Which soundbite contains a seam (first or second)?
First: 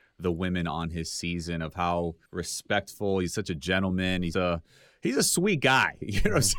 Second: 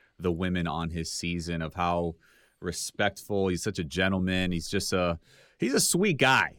first